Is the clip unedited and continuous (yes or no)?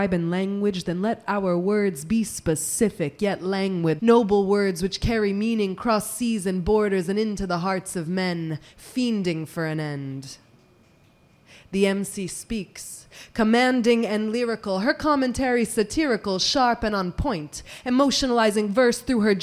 no